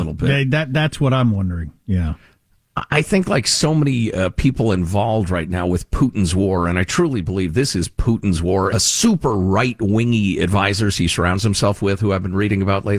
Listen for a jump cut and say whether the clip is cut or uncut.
cut